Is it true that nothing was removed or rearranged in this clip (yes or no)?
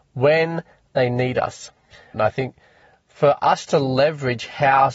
no